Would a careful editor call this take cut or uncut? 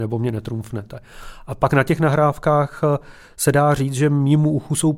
uncut